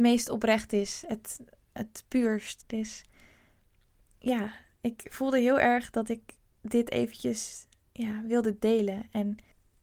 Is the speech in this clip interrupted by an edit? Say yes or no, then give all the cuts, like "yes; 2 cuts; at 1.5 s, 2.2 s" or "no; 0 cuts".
yes; 1 cut; at 2.6 s